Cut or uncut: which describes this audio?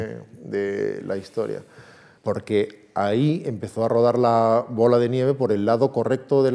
cut